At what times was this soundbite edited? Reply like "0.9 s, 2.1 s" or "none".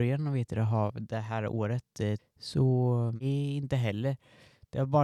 2.2 s